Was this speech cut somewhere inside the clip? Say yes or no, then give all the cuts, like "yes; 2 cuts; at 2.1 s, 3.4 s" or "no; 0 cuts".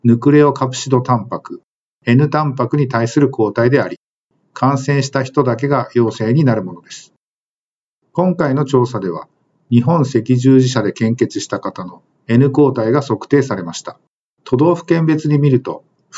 yes; 1 cut; at 14.2 s